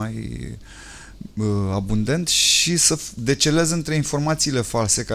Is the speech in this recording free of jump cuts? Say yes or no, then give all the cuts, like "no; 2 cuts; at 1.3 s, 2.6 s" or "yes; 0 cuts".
yes; 0 cuts